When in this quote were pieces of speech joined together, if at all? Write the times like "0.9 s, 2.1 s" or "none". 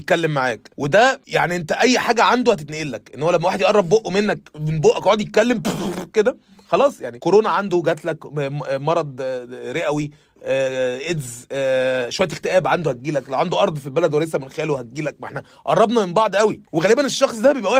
none